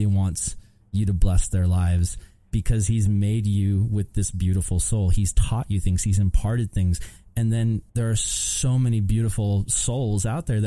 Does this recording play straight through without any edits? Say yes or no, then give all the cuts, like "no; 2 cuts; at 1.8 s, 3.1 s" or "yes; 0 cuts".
no; 1 cut; at 7.9 s